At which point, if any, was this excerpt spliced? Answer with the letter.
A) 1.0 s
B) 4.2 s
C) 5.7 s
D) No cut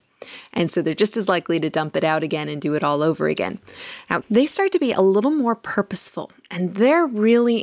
B